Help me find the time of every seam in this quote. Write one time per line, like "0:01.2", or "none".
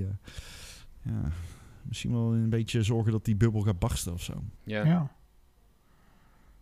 0:04.5